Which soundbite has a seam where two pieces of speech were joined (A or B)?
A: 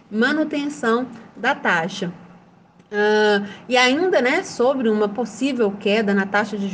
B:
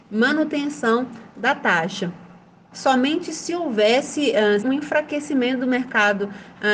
B